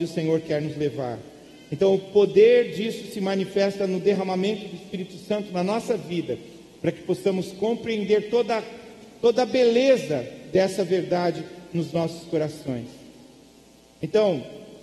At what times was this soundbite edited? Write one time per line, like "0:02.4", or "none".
none